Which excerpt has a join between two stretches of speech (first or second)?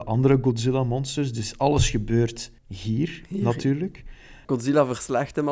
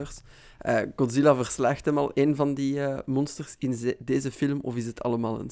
first